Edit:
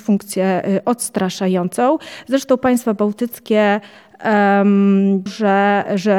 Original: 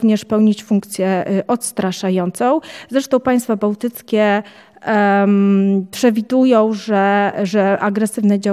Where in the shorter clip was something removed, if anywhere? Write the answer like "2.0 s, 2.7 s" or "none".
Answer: 5.3 s